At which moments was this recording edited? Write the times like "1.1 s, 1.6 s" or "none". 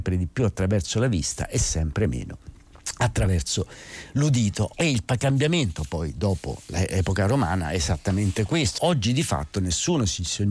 4.7 s, 8.8 s